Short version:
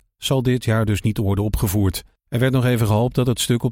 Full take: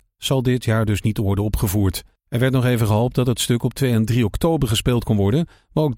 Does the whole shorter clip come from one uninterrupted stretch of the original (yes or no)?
yes